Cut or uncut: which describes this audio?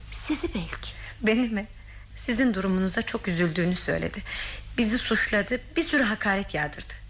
cut